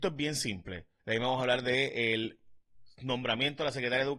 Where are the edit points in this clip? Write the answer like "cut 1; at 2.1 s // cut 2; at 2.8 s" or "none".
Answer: cut 1; at 1.0 s

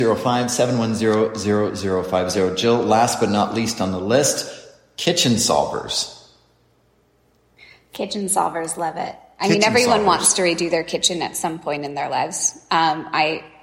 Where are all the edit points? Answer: none

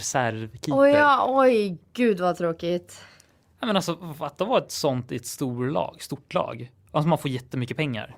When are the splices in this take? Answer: none

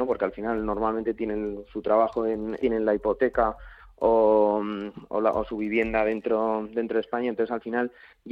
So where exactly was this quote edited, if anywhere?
cut 1; at 2.6 s

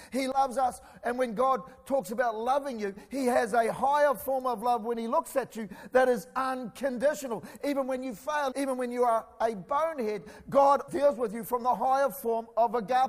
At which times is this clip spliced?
cut 1; at 8.5 s // cut 2; at 10.9 s

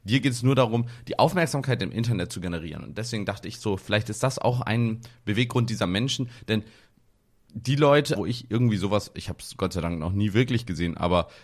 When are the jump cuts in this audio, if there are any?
cut 1; at 8.2 s

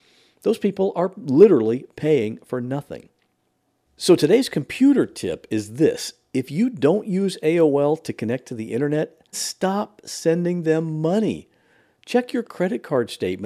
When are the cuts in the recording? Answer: cut 1; at 9.3 s

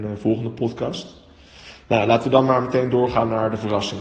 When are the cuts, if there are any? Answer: none

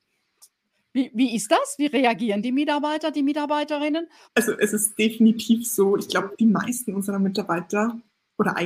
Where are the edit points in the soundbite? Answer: cut 1; at 4.2 s

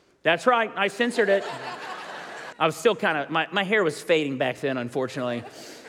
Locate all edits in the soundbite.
cut 1; at 2.5 s

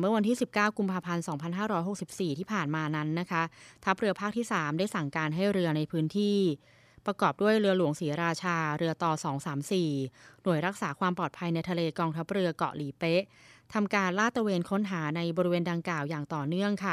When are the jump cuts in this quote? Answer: none

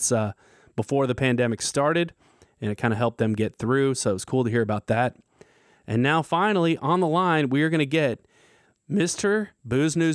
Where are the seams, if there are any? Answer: none

